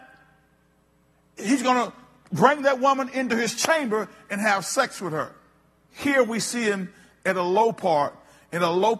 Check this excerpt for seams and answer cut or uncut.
cut